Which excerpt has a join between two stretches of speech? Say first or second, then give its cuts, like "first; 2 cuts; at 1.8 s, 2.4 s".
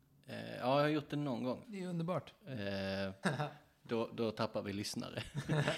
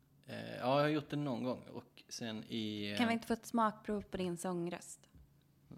first; 2 cuts; at 1.6 s, 3.2 s